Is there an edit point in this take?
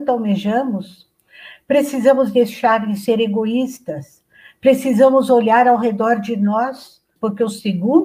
yes; 1 cut; at 7.2 s

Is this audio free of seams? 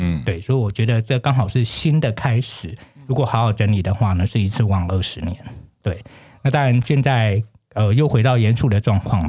yes; 0 cuts

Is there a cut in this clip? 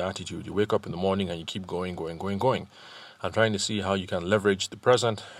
yes; 1 cut; at 2.0 s

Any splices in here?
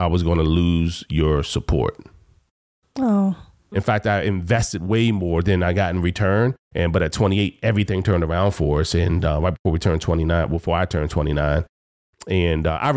yes; 2 cuts; at 3.7 s, 6.7 s

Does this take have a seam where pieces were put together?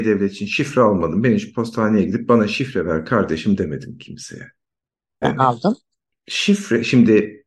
yes; 1 cut; at 5.2 s

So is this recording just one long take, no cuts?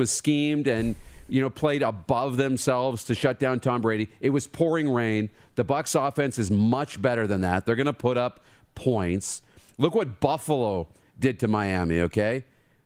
yes; 0 cuts

